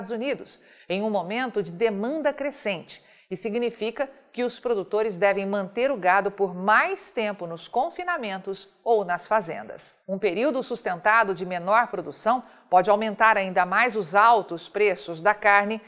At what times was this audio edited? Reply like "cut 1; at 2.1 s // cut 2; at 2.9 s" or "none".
cut 1; at 10.0 s